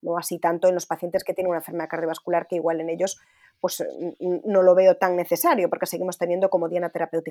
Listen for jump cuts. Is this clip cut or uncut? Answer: uncut